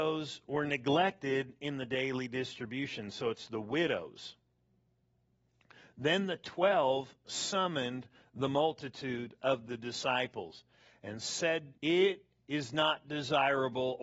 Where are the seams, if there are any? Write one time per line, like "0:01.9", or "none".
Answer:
0:11.8